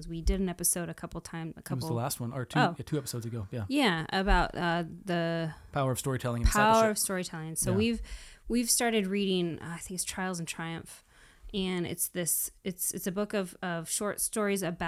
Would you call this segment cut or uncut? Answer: uncut